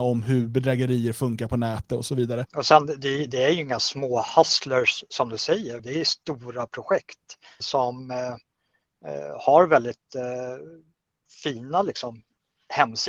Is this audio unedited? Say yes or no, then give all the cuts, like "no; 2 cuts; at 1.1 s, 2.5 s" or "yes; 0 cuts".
no; 3 cuts; at 2.5 s, 5.8 s, 7.6 s